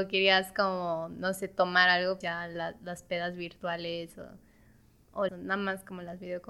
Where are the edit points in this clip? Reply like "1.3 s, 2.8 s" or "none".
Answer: 2.2 s, 5.3 s